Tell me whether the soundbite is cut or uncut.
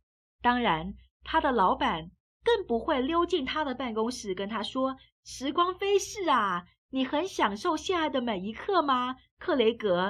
cut